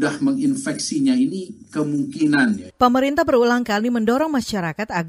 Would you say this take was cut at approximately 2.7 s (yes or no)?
yes